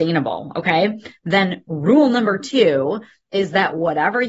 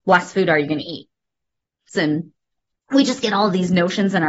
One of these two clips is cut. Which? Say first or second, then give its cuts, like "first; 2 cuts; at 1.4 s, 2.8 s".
second; 1 cut; at 1.9 s